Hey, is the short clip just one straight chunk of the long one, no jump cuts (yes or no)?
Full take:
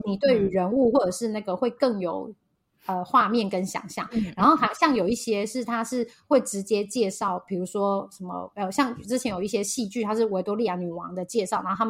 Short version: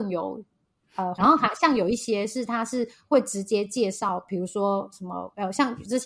no